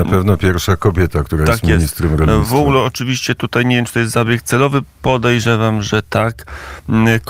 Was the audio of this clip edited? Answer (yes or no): no